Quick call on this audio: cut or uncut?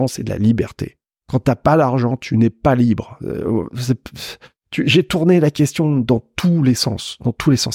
uncut